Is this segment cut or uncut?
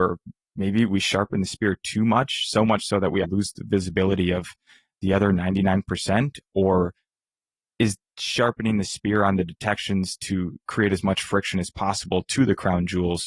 cut